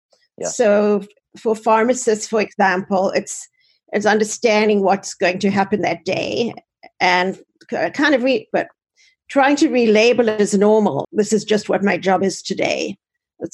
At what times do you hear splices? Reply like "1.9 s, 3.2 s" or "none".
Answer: 8.5 s, 11.0 s